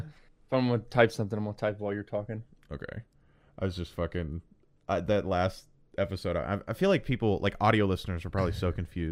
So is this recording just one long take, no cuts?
yes; 0 cuts

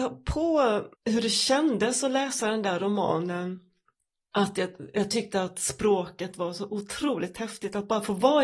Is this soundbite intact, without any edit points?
no; 1 cut; at 0.9 s

